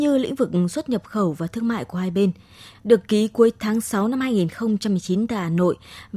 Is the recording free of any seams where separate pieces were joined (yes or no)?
no